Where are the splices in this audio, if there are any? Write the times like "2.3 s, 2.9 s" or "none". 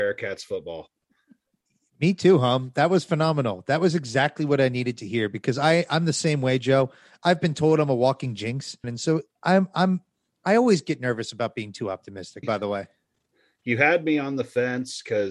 8.8 s, 12.4 s